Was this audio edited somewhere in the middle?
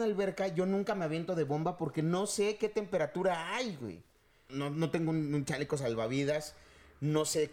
yes; 1 cut; at 4.5 s

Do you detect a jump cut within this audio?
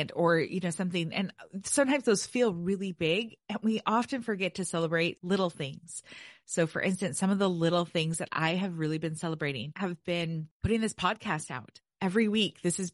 no; 0 cuts

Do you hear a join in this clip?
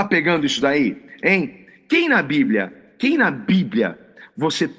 no; 0 cuts

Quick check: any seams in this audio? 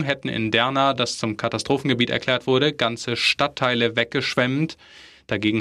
no; 0 cuts

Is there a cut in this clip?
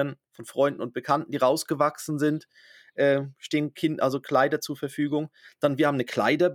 no; 0 cuts

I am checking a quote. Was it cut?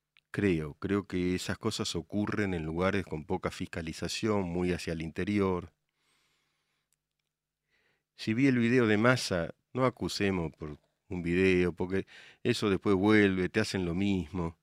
yes; 1 cut; at 9.6 s

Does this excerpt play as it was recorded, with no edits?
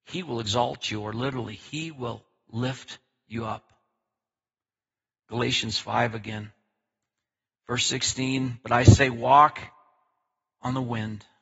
yes; 0 cuts

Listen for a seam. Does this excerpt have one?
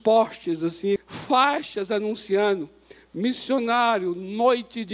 yes; 1 cut; at 1.0 s

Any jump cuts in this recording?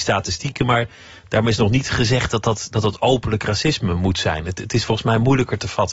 no; 0 cuts

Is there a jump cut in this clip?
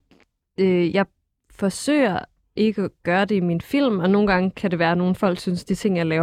no; 0 cuts

